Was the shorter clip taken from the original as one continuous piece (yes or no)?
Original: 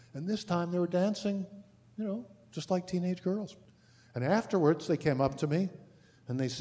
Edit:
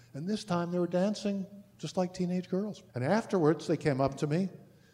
no